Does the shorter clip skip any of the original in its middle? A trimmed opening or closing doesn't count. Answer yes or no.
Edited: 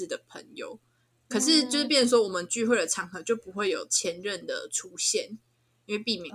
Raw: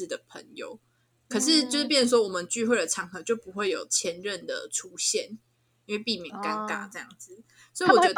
no